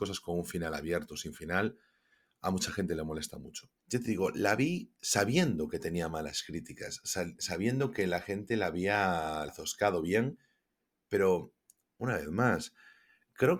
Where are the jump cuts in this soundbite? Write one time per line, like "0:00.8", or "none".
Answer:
0:03.8
0:09.5